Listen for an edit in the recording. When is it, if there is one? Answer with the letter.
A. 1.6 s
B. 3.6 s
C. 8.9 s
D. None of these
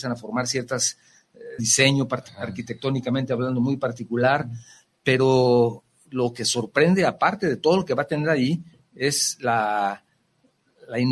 A